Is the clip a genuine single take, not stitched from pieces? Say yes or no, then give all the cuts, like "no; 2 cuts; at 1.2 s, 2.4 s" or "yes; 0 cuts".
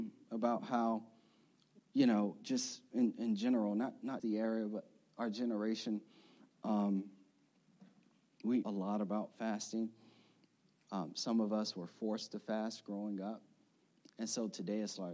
no; 2 cuts; at 4.2 s, 8.6 s